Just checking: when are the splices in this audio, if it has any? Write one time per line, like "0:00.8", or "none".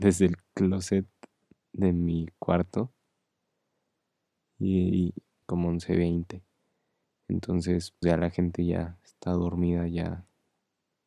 0:05.4
0:08.0